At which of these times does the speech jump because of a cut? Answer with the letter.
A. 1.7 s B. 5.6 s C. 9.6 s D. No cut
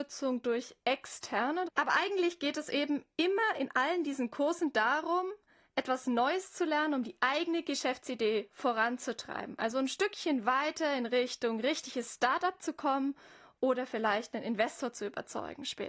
A